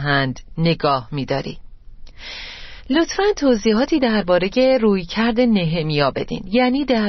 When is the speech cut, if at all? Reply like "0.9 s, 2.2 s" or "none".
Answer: none